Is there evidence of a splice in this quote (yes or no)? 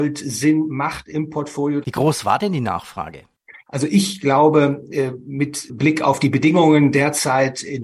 yes